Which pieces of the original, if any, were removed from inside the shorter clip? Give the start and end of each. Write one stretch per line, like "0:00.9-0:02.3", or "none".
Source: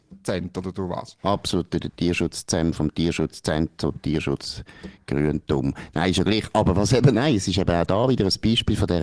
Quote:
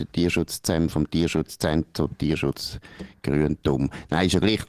none